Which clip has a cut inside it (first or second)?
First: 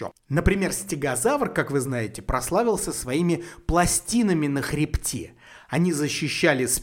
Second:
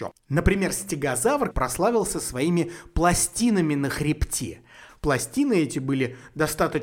second